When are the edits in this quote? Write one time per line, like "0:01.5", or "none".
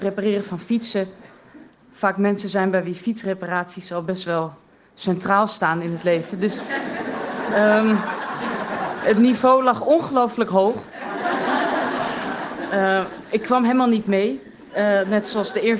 none